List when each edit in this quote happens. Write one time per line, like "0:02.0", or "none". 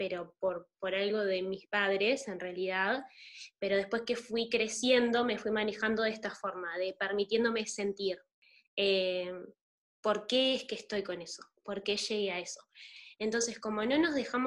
0:13.1